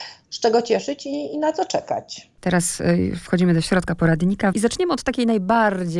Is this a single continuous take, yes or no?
no